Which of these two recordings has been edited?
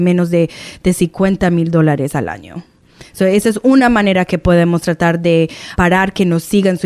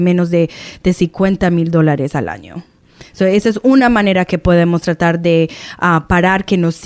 first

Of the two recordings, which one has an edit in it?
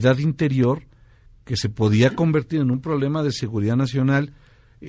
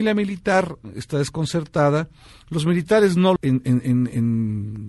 second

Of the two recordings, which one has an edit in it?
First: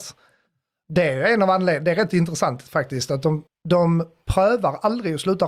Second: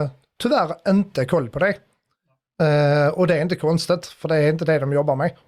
first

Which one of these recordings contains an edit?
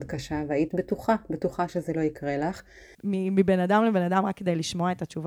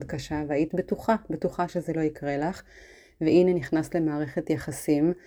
first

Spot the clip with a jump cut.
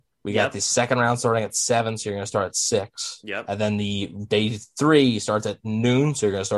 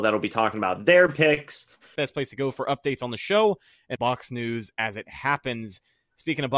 second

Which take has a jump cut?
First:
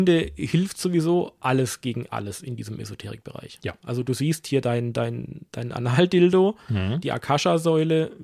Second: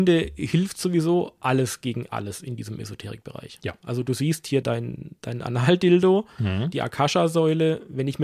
second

